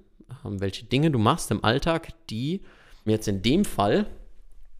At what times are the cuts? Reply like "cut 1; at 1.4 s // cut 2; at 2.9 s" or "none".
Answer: cut 1; at 3.1 s